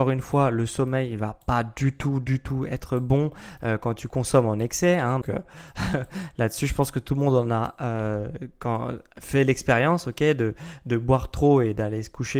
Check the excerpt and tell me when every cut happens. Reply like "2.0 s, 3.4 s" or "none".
5.2 s